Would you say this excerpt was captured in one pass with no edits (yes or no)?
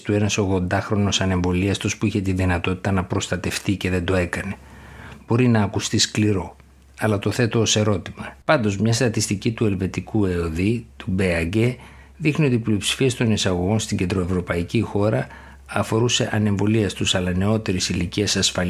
no